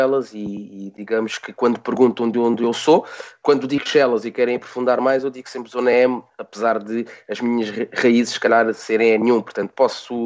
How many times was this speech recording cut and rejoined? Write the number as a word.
zero